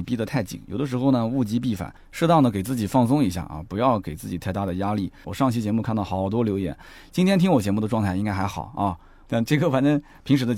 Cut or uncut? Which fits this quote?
cut